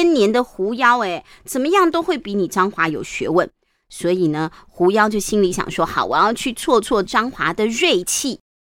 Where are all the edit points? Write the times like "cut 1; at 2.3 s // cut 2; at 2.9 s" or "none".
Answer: none